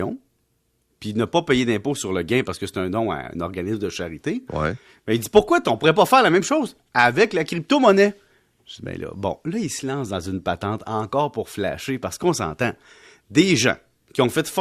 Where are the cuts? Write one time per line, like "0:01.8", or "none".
none